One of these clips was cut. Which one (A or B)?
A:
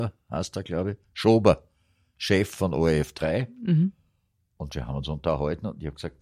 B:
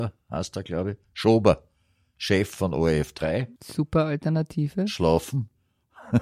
B